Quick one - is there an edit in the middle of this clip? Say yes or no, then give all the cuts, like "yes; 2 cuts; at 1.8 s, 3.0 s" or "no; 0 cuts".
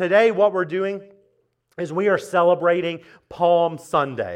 no; 0 cuts